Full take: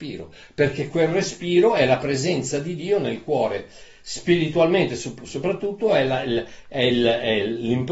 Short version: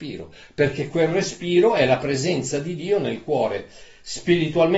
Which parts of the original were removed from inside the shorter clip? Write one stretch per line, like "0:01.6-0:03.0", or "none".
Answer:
none